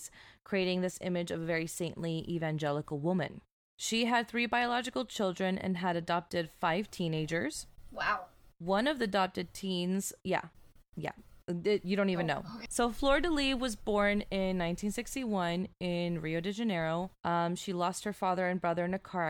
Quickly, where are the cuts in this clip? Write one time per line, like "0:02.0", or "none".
0:12.7
0:17.2